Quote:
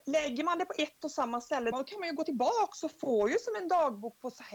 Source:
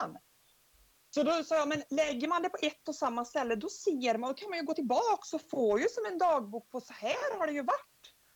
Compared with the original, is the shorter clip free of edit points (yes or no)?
no